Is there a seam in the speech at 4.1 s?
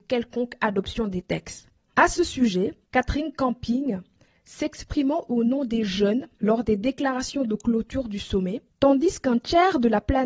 no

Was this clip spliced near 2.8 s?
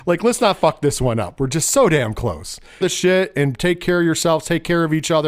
yes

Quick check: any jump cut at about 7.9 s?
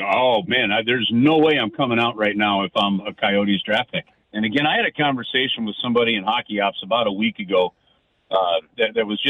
no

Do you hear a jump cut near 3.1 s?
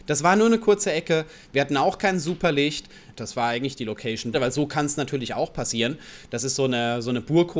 yes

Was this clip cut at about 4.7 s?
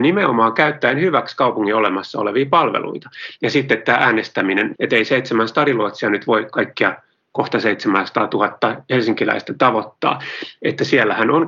yes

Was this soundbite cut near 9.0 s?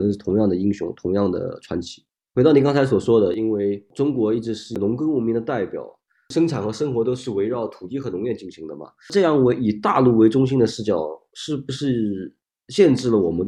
no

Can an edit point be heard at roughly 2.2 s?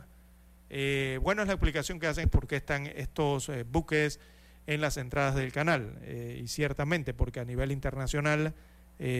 yes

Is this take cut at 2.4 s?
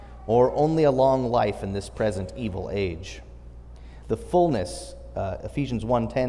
no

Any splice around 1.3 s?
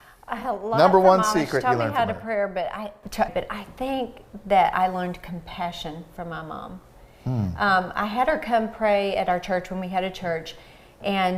no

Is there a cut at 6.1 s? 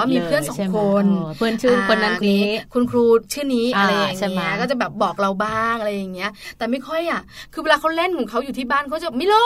no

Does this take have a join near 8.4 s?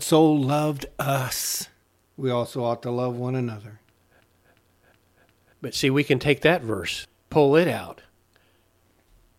no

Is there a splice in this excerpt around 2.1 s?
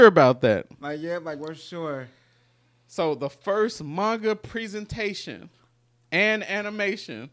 no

